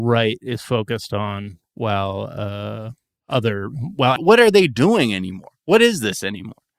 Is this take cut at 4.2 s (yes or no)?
yes